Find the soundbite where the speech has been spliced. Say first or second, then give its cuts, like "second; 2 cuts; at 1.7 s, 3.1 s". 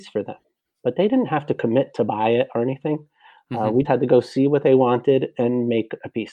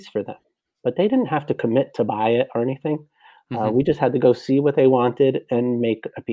first; 1 cut; at 3.8 s